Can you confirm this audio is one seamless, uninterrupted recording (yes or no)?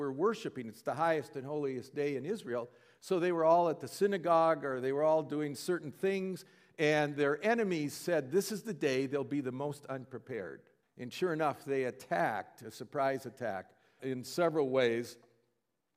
no